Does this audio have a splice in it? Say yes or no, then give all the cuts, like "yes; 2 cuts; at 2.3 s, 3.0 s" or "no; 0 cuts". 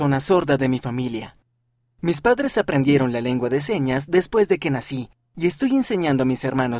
no; 0 cuts